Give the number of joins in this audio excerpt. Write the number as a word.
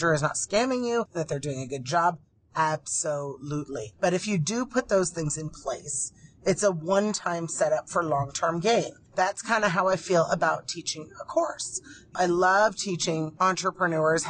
zero